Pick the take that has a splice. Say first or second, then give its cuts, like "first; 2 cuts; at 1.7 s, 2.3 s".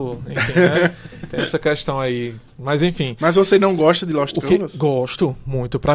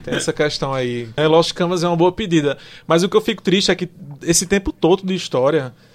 second; 1 cut; at 1.2 s